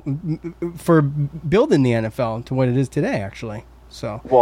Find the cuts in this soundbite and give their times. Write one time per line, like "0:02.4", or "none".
none